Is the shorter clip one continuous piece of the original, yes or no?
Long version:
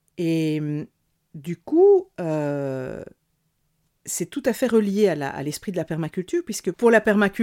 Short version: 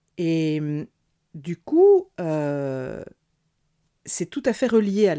yes